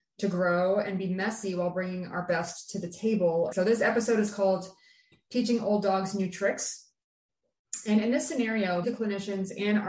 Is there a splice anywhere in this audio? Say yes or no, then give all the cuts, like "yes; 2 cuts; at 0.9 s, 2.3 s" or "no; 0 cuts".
yes; 2 cuts; at 3.5 s, 8.8 s